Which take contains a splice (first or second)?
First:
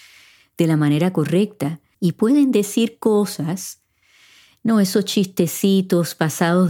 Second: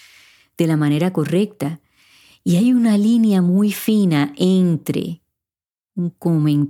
first